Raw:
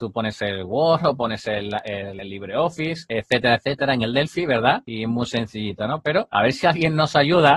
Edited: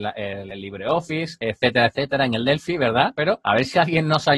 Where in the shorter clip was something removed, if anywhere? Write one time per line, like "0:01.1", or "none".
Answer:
0:03.1